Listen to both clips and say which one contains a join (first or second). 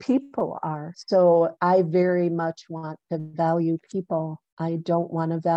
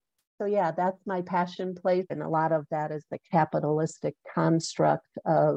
second